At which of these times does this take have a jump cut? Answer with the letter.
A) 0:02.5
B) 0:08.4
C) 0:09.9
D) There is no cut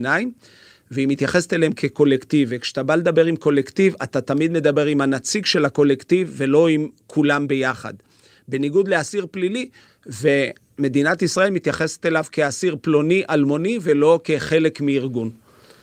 C